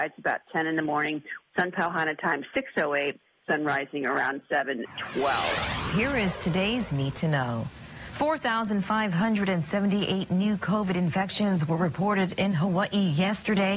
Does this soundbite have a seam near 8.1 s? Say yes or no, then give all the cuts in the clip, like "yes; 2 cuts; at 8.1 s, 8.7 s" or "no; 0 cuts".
no; 1 cut; at 1.4 s